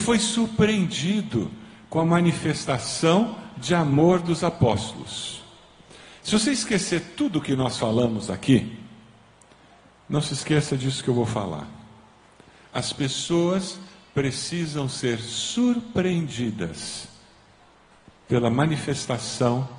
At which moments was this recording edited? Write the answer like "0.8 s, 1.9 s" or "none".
none